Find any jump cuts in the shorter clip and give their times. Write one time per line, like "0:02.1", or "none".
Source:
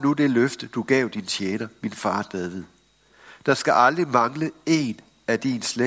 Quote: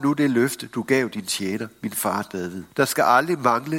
0:02.7